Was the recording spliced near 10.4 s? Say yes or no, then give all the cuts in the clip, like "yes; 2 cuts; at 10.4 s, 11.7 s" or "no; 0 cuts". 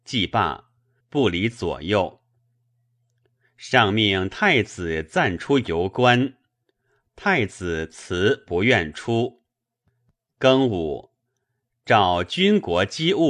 yes; 2 cuts; at 1.0 s, 10.4 s